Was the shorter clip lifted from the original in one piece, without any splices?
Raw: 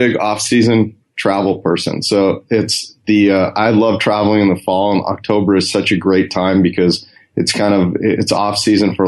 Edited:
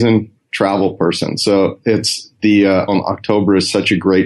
no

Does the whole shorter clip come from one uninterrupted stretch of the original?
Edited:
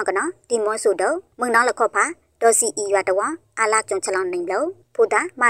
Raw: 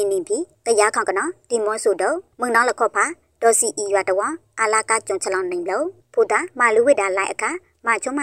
no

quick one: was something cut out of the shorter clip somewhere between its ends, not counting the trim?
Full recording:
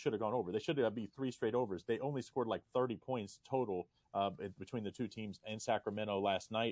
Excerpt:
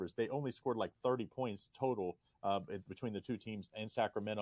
no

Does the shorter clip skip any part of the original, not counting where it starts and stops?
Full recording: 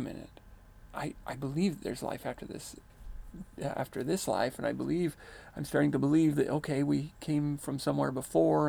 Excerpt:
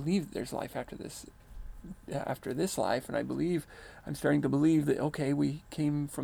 no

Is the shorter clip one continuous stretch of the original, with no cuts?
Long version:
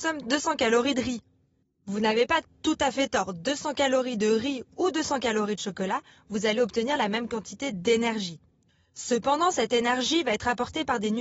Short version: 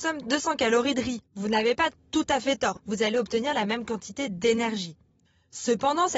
no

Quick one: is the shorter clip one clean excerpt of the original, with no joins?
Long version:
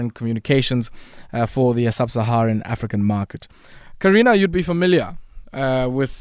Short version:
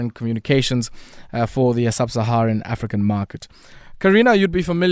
yes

